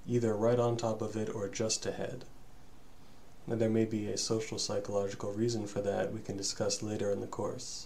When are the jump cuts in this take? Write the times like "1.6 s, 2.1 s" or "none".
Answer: 3.4 s